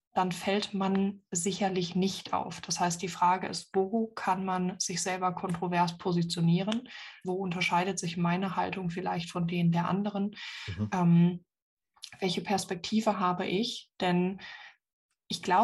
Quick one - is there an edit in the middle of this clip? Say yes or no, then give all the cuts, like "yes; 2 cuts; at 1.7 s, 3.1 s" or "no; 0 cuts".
yes; 1 cut; at 7.2 s